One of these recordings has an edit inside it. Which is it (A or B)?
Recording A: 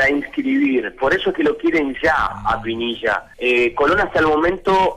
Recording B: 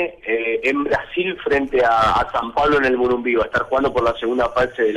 A